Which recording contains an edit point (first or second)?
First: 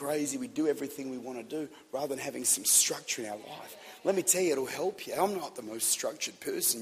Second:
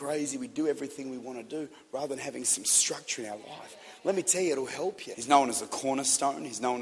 second